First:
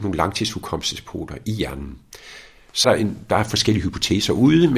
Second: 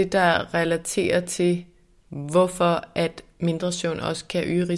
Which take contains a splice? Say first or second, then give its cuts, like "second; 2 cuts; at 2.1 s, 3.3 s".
first; 1 cut; at 2.8 s